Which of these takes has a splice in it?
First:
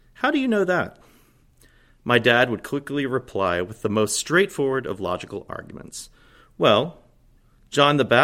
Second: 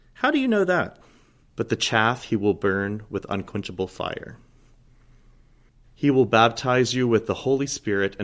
second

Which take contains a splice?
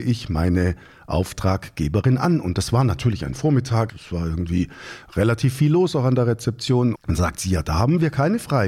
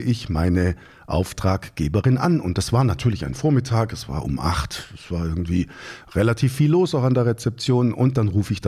first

